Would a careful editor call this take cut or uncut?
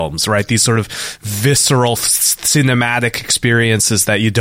uncut